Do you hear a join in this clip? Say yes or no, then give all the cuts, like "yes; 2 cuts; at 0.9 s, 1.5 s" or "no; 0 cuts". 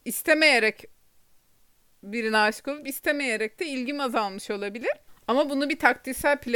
yes; 1 cut; at 5.1 s